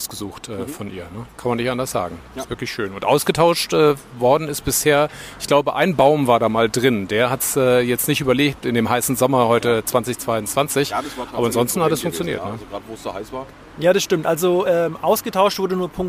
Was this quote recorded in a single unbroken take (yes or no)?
yes